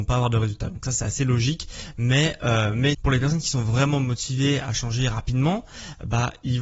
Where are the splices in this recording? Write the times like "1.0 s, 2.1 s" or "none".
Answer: 2.9 s

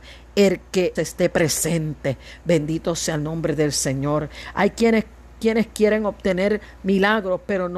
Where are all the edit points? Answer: 1.0 s

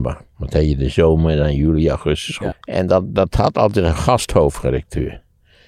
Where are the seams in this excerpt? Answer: 2.5 s

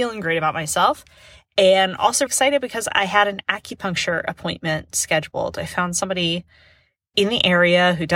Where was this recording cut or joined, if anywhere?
2.3 s

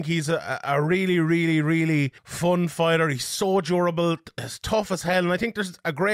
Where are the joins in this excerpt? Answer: 2.2 s

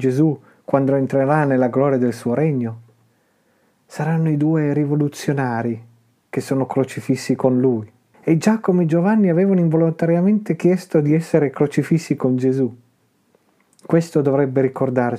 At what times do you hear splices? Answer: 8.1 s

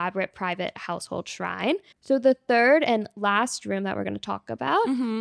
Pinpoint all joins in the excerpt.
1.9 s

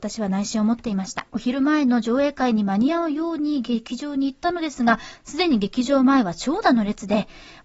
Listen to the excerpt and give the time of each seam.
1.3 s

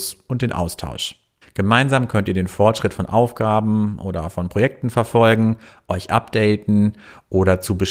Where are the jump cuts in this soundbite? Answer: 1.4 s

